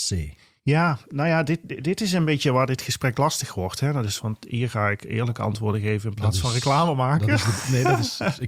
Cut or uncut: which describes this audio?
uncut